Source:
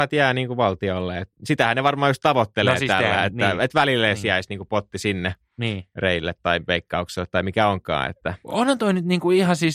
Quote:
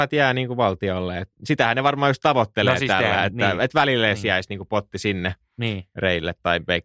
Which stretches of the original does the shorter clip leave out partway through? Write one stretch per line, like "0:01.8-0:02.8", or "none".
none